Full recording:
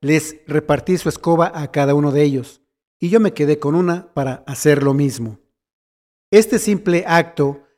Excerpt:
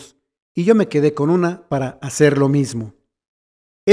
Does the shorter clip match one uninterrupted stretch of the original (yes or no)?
yes